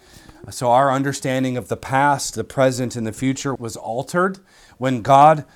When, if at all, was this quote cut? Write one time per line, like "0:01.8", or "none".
0:03.6